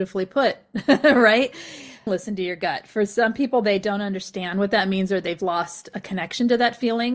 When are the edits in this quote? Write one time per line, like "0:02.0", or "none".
0:02.1